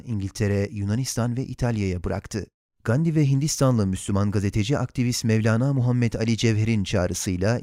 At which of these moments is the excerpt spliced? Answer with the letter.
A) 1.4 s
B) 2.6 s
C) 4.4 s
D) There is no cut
B